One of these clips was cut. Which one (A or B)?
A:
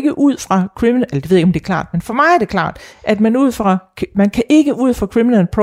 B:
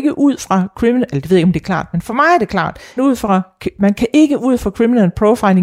B